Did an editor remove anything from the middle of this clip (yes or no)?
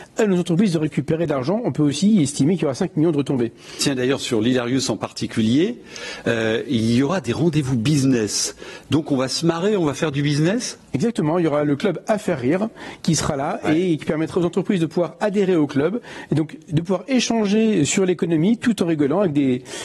no